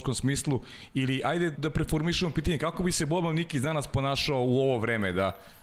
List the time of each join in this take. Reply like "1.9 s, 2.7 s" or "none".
1.5 s